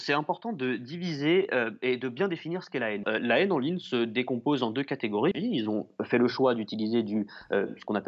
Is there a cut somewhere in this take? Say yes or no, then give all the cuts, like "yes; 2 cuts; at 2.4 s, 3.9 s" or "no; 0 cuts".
yes; 2 cuts; at 3.0 s, 5.3 s